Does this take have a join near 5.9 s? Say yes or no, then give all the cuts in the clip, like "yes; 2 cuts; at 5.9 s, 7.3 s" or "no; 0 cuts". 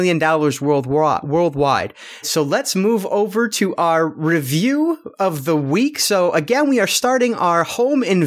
no; 1 cut; at 2.2 s